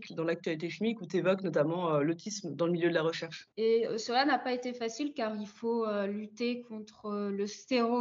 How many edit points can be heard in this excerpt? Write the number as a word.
one